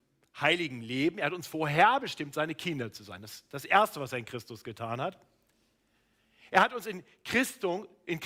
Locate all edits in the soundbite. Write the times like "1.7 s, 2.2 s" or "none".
none